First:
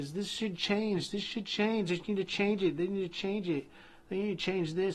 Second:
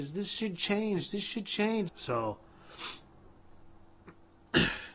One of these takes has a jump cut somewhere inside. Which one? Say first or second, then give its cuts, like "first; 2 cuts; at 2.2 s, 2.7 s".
second; 1 cut; at 1.9 s